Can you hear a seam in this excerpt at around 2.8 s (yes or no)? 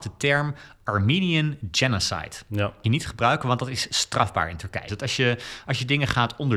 no